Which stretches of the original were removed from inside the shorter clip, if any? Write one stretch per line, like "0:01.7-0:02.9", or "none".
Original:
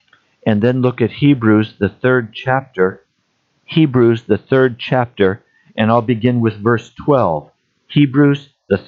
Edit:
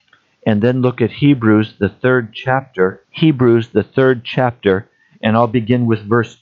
0:03.0-0:03.6